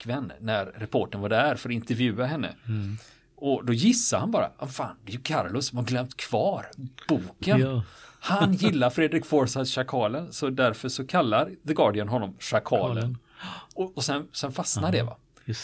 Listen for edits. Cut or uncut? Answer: uncut